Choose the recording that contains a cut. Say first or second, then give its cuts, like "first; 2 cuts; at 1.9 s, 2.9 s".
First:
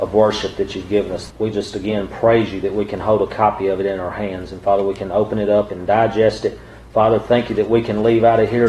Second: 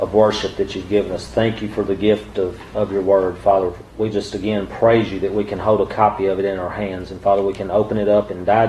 first; 1 cut; at 1.3 s